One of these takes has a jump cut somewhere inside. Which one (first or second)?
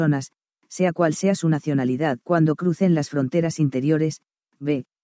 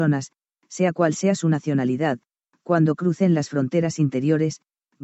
first